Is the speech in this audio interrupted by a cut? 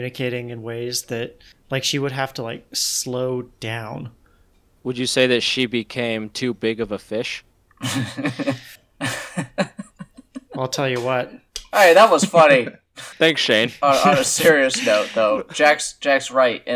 no; 0 cuts

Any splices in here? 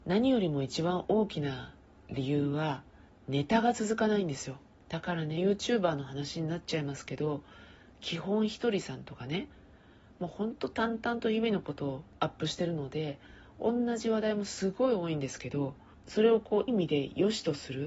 yes; 1 cut; at 16.7 s

